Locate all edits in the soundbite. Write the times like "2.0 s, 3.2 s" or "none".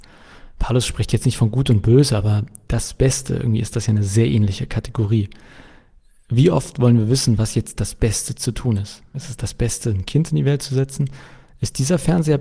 9.1 s